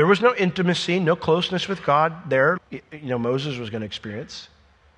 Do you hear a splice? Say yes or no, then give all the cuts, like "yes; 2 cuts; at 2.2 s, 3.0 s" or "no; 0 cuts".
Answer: yes; 1 cut; at 2.6 s